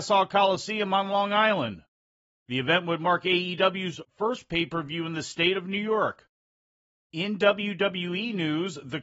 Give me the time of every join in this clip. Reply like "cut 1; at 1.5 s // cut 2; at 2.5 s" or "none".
none